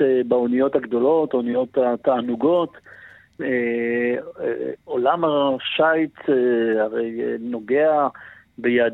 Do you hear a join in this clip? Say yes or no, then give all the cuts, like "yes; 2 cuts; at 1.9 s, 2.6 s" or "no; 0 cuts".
yes; 1 cut; at 3.4 s